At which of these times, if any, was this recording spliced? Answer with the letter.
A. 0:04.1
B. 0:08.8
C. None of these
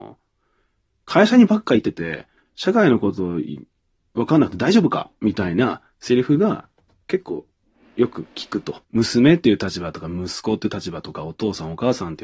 B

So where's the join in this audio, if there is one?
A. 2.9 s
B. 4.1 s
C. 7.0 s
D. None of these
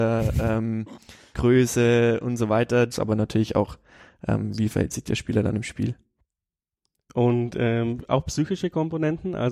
A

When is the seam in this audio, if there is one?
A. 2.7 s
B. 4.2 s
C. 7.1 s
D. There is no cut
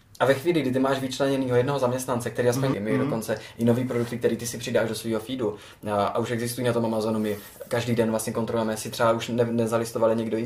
A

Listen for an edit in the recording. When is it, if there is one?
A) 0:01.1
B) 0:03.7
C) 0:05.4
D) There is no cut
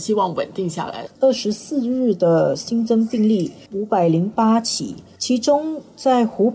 A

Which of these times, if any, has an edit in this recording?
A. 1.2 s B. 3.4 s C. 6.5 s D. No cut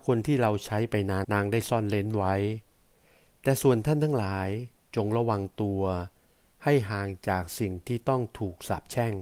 A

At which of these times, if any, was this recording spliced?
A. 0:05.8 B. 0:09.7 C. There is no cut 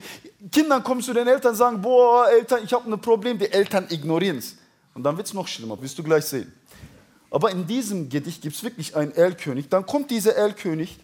A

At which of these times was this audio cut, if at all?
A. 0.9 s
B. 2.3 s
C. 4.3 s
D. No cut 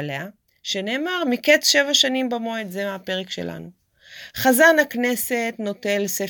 D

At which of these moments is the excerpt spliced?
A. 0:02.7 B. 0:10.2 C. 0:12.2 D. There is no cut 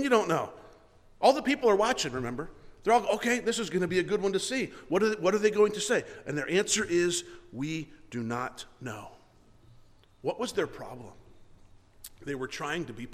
D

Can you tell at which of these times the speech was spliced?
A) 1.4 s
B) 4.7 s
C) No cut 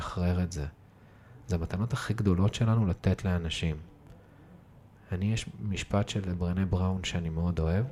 A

